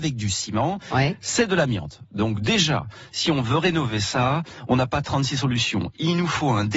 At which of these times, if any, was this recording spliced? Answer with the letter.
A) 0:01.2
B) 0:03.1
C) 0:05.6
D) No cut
D